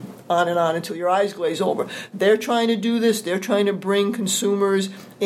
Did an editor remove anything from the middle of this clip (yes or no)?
yes